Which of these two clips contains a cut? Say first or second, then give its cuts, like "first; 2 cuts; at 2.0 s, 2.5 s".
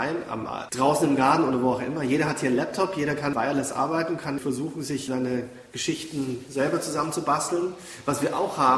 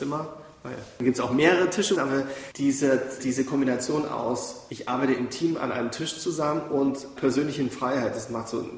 second; 3 cuts; at 2.0 s, 3.2 s, 7.2 s